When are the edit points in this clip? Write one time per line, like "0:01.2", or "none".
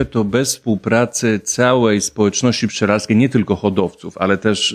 none